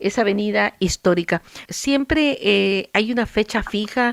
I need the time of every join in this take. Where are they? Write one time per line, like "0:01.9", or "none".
0:01.6